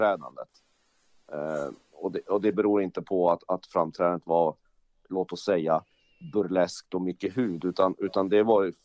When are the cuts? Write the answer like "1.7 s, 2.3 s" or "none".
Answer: none